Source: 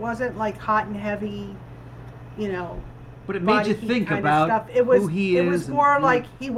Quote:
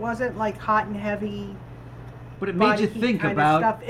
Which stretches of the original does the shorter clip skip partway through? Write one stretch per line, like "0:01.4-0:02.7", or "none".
0:02.4-0:03.2